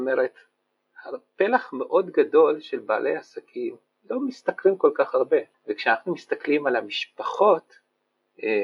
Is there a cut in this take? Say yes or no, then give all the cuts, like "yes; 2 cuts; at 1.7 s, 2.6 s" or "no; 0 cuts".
yes; 1 cut; at 5.5 s